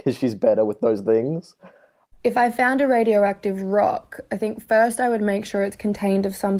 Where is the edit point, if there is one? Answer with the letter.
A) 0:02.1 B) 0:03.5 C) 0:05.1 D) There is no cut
A